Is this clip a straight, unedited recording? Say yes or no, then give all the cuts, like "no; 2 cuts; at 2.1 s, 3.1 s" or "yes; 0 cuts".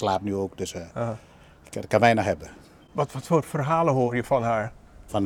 yes; 0 cuts